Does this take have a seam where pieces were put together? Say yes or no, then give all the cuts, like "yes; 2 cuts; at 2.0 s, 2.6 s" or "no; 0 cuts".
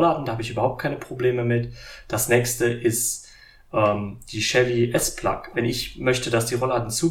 yes; 1 cut; at 5.5 s